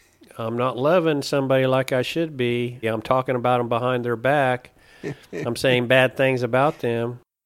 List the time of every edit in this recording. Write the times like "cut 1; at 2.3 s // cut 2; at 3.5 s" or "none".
cut 1; at 2.8 s